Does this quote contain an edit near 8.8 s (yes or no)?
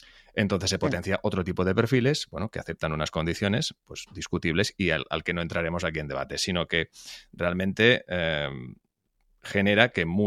no